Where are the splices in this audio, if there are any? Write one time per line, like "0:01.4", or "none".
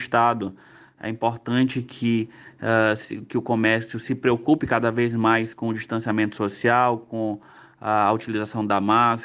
none